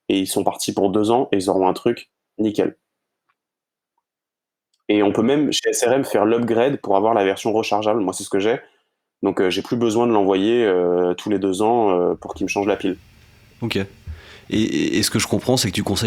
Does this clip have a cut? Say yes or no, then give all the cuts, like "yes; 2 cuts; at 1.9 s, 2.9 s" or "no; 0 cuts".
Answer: no; 0 cuts